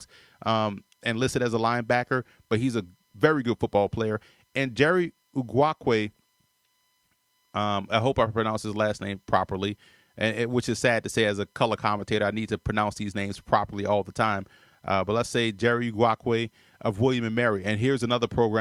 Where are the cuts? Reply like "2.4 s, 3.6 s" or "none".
none